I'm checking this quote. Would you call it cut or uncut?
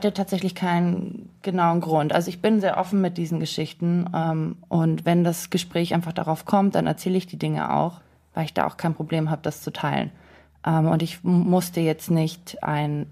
uncut